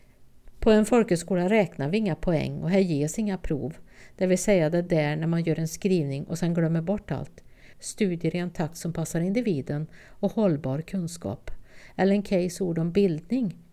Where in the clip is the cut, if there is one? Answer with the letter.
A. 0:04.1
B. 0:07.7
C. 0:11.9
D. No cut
B